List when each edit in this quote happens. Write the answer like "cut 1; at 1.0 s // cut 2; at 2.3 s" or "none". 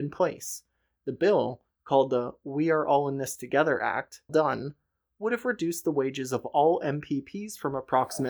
cut 1; at 4.3 s